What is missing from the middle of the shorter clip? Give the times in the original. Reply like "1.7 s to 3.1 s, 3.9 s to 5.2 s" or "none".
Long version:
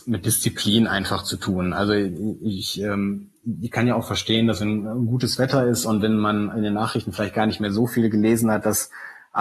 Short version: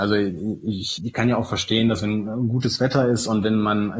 2.8 s to 3.6 s

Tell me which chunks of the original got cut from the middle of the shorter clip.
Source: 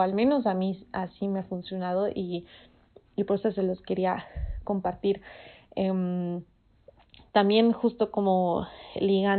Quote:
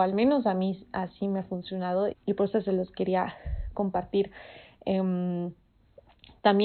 2.1 s to 3.0 s

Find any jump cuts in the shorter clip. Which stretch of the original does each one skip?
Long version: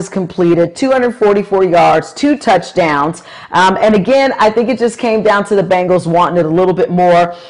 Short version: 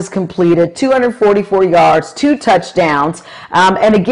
none

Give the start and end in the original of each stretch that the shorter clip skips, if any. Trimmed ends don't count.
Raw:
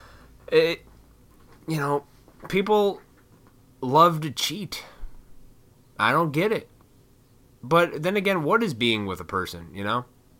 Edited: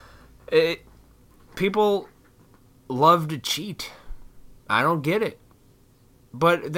1.5 s to 2.5 s, 5.5 s to 5.9 s

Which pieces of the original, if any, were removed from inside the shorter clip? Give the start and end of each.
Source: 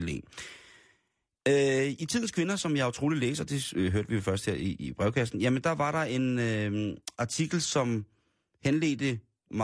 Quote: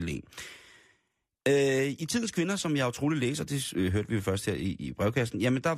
none

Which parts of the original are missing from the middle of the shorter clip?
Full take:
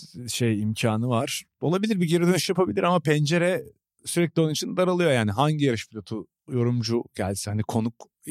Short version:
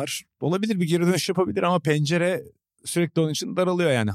none

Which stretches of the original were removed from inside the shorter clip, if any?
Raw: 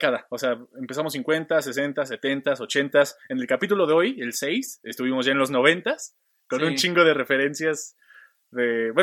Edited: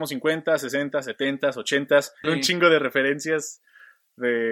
3.3 s to 6.6 s

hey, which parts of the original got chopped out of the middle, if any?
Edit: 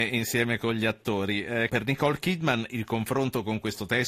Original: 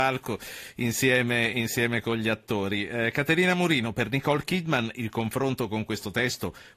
3.1 s to 3.9 s

